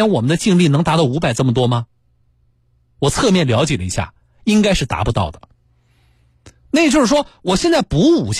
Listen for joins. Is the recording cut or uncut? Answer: uncut